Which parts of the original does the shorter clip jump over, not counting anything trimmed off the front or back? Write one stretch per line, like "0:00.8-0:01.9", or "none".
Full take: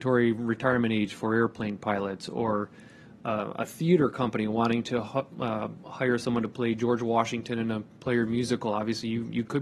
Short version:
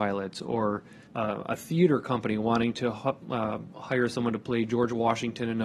0:02.9-0:03.1